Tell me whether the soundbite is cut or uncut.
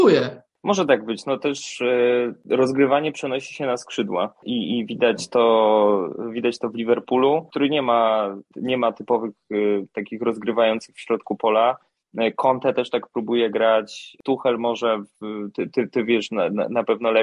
uncut